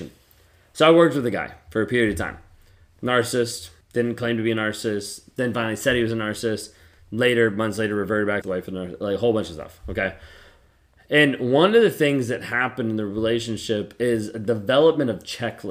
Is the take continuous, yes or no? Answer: no